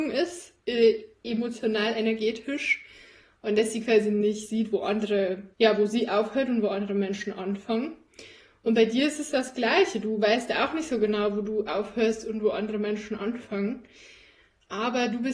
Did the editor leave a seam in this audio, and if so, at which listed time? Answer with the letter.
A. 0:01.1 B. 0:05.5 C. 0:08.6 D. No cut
B